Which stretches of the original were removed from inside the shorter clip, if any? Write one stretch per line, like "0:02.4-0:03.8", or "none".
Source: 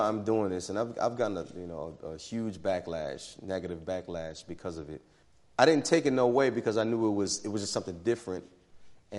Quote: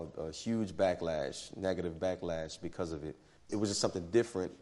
0:05.3-0:07.4